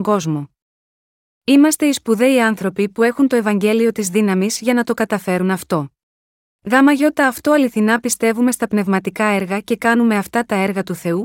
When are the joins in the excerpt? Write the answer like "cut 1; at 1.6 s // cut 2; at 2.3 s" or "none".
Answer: cut 1; at 6.5 s